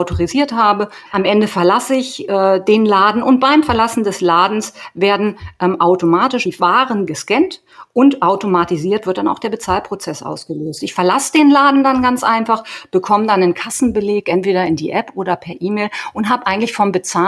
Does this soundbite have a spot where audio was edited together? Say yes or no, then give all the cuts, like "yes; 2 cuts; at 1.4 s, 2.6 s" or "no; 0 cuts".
yes; 1 cut; at 1.1 s